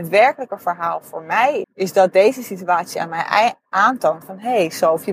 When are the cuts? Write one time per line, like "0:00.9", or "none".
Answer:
0:01.6